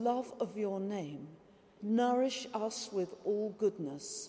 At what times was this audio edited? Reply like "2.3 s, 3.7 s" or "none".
1.8 s